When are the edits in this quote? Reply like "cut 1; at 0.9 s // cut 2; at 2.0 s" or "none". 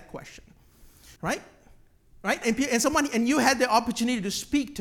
cut 1; at 1.2 s // cut 2; at 2.4 s